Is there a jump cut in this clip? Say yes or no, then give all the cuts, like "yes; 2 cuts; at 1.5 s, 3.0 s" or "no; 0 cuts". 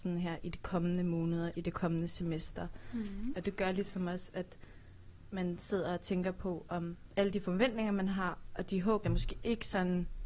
yes; 2 cuts; at 3.3 s, 9.0 s